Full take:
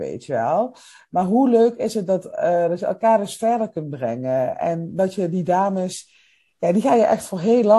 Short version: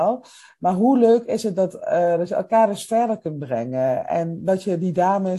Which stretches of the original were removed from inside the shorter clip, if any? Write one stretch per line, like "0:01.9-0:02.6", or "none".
none